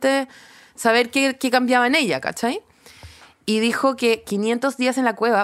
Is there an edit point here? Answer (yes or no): no